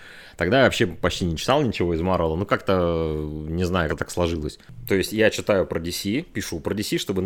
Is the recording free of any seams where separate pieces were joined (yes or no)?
no